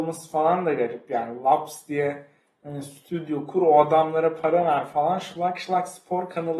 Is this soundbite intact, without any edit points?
yes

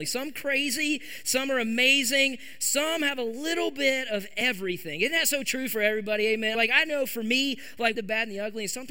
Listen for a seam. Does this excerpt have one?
yes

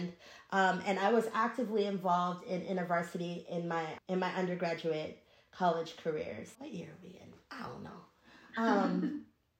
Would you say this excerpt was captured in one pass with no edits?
no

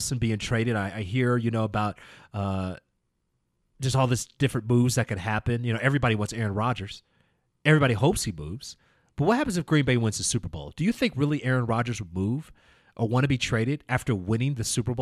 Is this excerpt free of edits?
yes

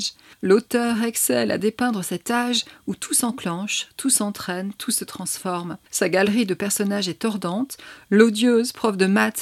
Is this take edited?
no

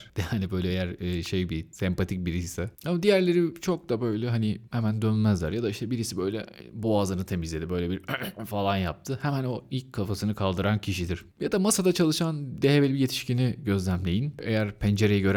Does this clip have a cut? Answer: no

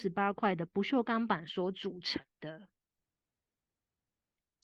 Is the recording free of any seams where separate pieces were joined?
yes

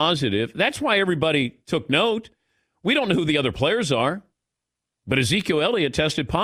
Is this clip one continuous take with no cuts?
yes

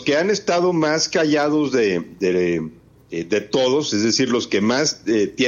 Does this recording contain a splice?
no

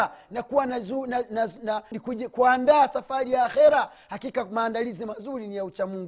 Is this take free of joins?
no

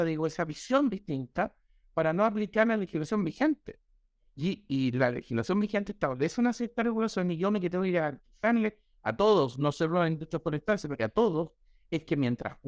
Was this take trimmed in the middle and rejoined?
no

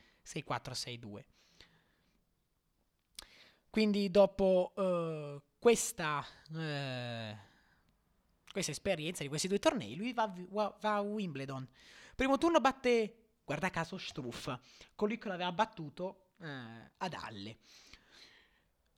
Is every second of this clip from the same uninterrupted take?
yes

